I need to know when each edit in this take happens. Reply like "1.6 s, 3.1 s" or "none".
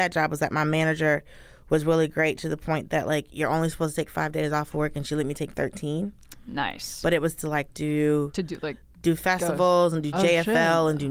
none